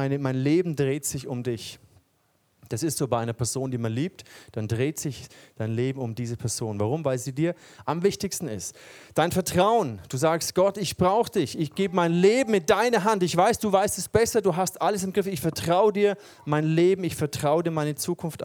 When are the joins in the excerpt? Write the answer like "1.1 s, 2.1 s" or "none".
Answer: none